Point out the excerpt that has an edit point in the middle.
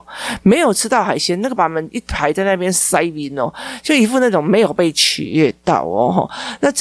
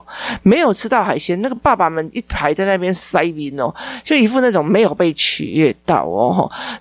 first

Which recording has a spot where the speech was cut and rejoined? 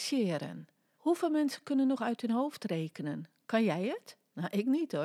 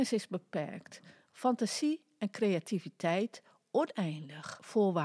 first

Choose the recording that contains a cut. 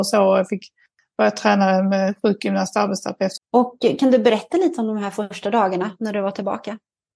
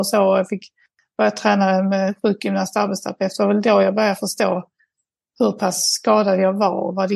first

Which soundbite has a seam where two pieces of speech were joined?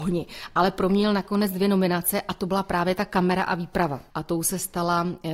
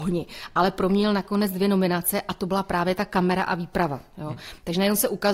first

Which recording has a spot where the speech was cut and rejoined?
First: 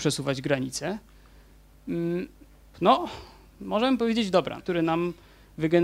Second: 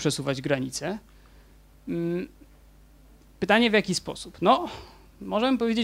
first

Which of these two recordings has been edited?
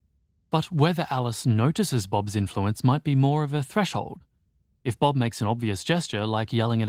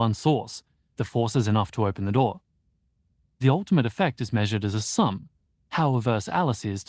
second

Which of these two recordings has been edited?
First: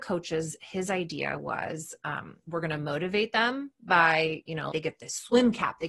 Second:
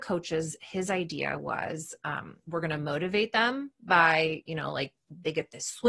first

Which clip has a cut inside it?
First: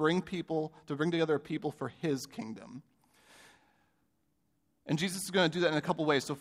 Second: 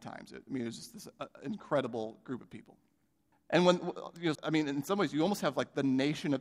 second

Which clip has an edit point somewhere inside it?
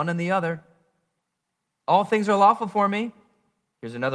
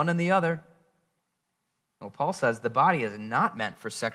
first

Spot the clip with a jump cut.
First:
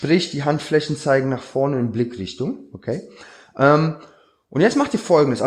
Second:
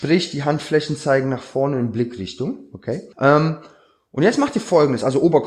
second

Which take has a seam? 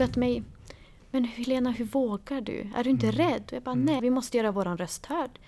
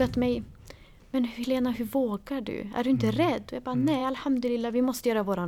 first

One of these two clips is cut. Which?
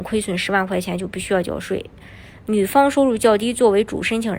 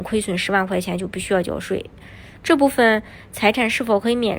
second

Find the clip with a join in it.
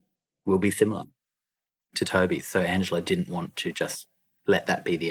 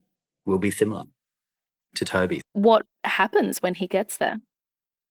second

